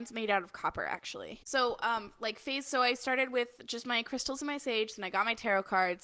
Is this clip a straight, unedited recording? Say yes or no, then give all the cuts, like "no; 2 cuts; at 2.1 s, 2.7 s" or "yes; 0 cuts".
yes; 0 cuts